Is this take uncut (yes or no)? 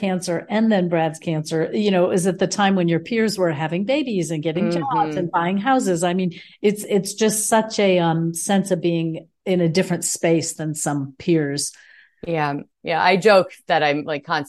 yes